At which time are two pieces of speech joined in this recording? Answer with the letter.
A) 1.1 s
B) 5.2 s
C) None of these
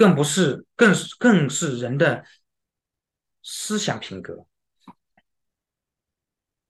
B